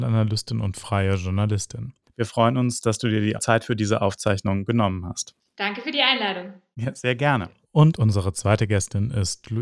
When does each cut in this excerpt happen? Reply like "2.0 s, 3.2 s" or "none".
2.1 s